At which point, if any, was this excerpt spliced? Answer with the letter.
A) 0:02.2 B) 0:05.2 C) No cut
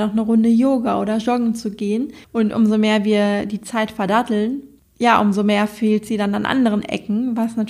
A